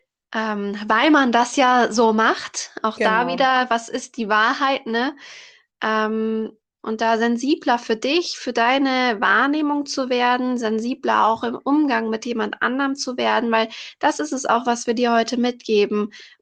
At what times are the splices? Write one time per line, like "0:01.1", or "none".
none